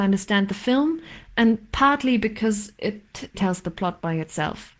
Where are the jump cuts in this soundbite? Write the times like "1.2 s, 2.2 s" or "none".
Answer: 3.3 s